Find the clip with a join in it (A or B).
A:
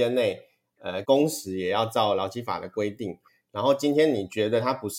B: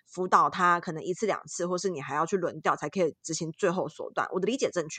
A